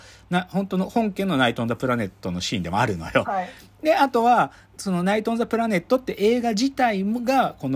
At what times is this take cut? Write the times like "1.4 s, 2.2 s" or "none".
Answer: 3.2 s